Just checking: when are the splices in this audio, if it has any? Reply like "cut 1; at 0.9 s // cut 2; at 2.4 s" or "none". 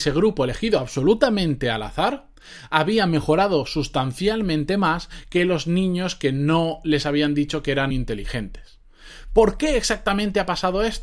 cut 1; at 7.9 s